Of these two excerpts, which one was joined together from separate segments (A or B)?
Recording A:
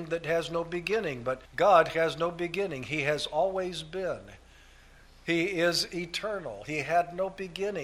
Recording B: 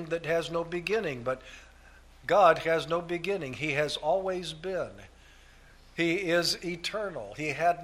A